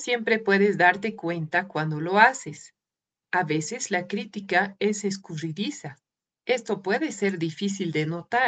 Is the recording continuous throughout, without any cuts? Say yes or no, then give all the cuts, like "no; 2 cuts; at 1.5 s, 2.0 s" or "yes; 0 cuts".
no; 1 cut; at 6.3 s